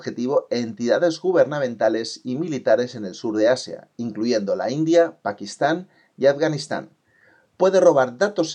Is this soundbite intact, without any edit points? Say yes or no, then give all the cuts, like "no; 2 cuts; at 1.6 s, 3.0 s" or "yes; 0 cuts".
yes; 0 cuts